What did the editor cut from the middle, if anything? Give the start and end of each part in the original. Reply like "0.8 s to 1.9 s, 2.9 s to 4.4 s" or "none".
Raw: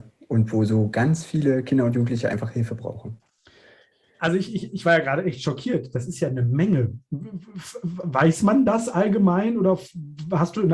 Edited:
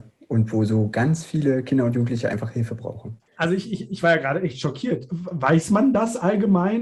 3.3 s to 4.1 s, 5.9 s to 7.8 s